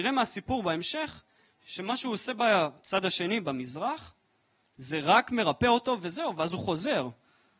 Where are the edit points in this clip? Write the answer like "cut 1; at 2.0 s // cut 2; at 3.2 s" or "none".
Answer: none